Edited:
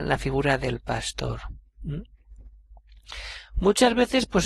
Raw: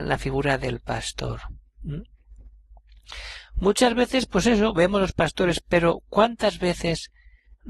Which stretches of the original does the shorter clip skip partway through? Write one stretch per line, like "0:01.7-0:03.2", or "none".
none